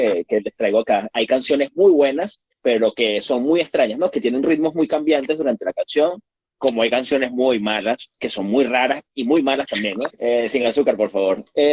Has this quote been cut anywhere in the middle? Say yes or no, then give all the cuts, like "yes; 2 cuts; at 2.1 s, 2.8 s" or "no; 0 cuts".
yes; 1 cut; at 10.1 s